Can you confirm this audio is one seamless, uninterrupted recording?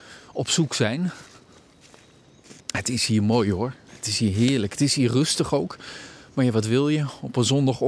no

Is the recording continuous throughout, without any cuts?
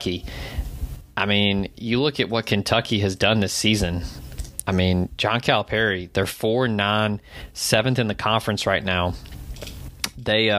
yes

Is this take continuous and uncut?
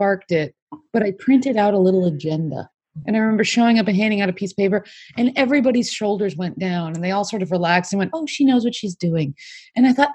yes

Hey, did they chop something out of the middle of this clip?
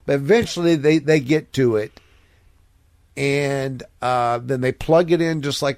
no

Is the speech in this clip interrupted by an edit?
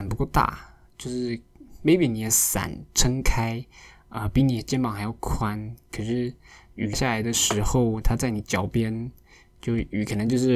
yes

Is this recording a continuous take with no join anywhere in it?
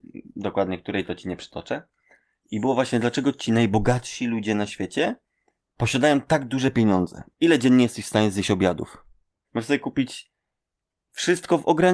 no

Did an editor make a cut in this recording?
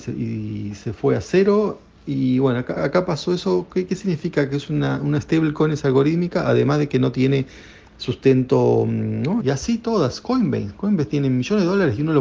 yes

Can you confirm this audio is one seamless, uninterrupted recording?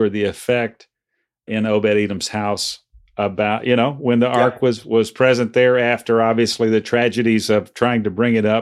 yes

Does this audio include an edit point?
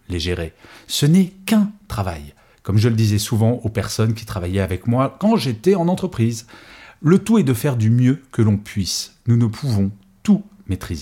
no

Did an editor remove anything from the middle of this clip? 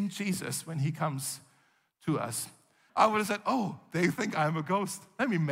yes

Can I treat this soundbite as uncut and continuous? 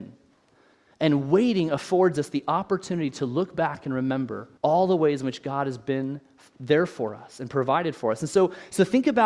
no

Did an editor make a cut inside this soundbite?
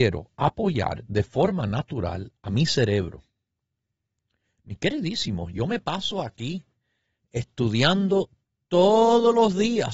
no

